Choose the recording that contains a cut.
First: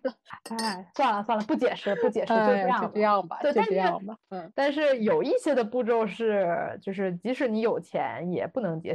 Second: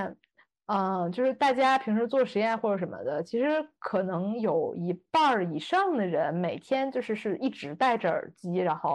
first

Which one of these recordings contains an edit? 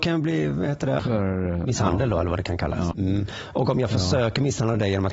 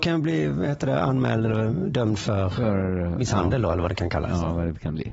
first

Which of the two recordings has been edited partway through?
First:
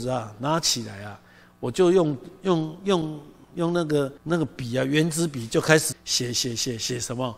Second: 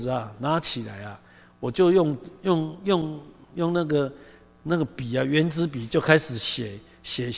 first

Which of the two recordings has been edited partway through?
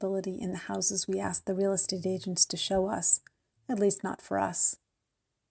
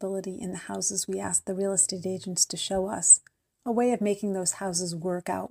first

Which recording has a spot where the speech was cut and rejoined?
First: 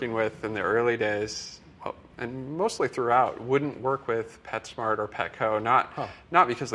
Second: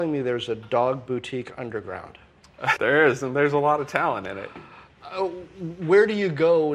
second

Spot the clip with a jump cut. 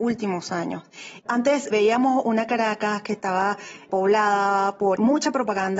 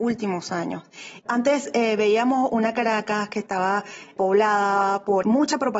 first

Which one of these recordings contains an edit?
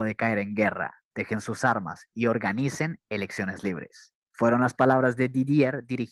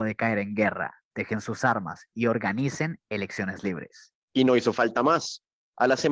second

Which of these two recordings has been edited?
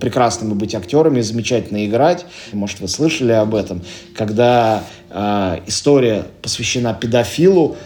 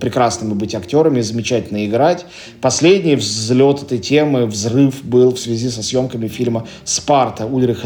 first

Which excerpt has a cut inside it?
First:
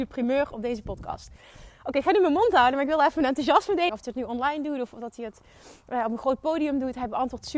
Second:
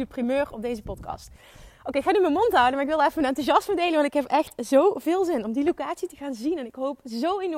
first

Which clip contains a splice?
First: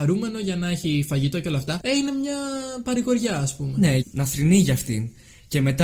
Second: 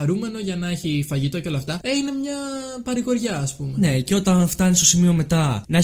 first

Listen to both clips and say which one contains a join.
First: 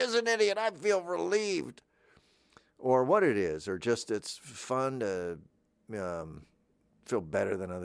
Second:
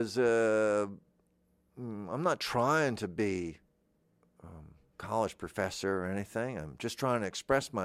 second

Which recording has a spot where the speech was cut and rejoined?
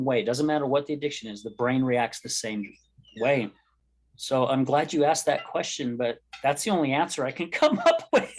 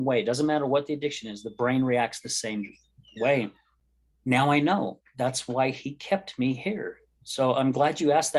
first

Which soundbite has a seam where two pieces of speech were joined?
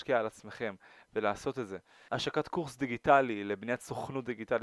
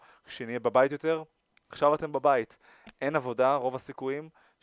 first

